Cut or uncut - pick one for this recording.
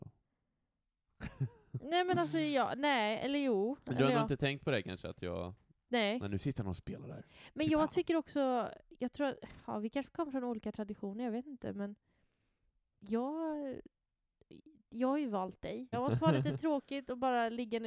cut